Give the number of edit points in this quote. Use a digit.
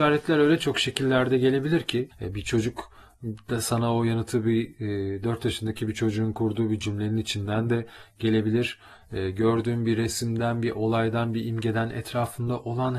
1